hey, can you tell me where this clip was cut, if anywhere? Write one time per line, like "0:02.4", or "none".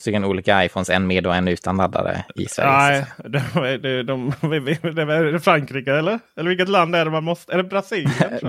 none